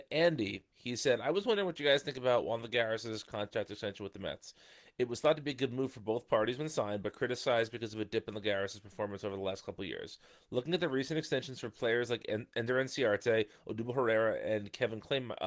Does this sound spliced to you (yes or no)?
no